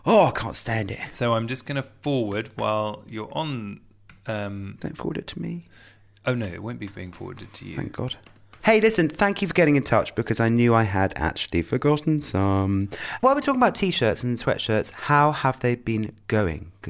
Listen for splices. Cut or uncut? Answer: cut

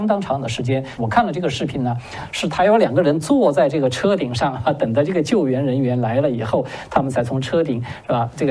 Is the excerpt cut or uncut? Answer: cut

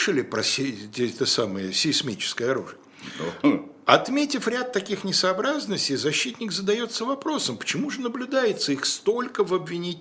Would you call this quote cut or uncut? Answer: uncut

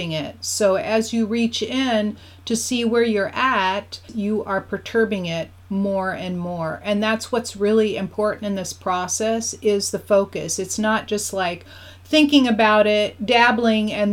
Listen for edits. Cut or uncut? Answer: cut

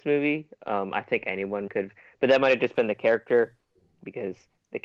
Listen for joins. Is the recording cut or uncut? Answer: cut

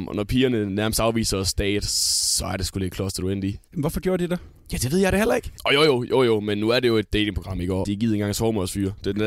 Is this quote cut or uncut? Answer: cut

